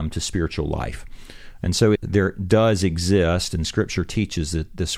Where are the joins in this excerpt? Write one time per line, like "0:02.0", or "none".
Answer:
0:01.9